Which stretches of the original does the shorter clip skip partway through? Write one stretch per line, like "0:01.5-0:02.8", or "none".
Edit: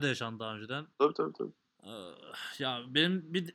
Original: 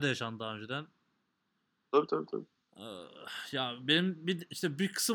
0:00.9-0:01.9

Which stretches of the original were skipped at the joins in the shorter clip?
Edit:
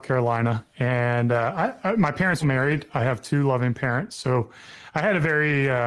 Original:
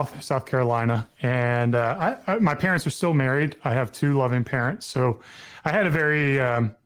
0:02.8-0:03.1

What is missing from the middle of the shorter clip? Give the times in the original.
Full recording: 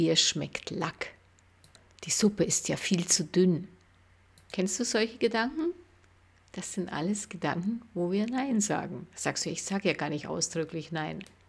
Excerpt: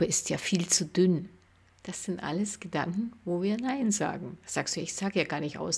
0:04.0-0:06.3

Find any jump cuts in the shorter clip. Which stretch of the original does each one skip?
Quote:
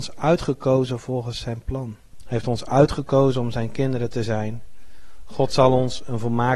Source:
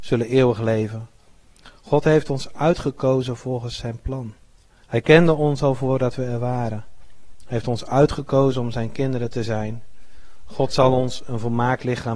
0:04.5-0:07.3

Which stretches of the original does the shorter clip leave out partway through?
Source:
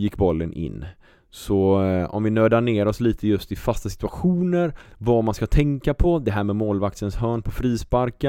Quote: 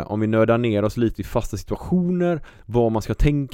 0:03.2-0:03.5

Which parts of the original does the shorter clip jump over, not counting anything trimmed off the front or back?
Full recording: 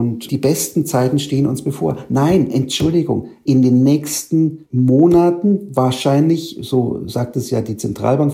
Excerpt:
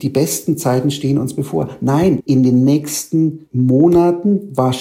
0:02.5-0:03.4

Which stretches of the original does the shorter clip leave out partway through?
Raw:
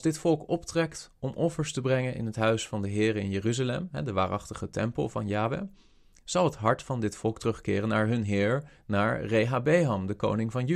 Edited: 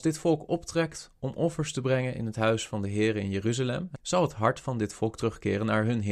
0:04.0-0:06.2

